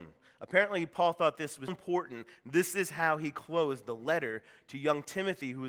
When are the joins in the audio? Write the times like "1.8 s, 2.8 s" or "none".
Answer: 1.7 s